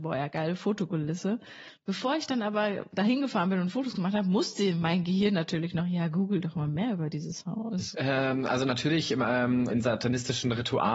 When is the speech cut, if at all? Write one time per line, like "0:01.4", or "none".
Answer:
0:07.9
0:09.7